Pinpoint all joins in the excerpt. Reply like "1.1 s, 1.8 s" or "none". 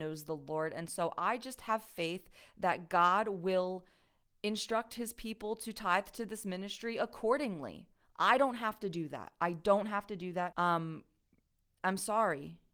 10.5 s